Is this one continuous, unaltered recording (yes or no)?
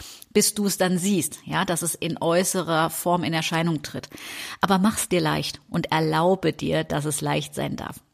yes